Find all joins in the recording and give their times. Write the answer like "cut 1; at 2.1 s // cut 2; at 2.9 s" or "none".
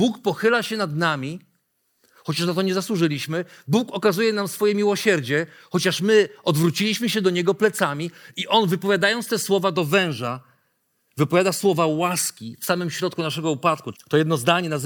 cut 1; at 13.9 s